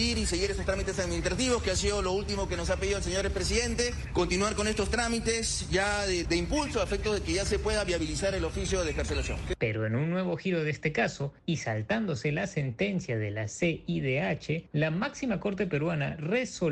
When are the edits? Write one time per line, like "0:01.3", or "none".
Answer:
0:06.2
0:09.6